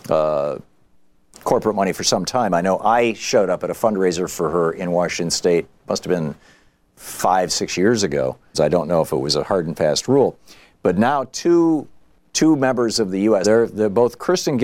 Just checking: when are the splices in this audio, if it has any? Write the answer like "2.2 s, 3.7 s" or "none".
8.5 s, 13.4 s